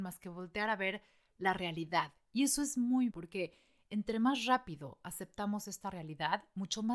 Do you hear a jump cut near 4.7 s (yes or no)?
no